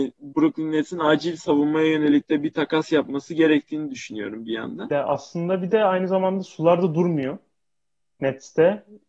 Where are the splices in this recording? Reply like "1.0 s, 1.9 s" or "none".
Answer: 4.9 s